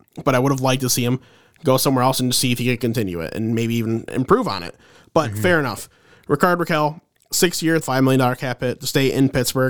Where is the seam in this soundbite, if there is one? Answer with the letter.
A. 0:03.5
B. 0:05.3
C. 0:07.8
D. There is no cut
C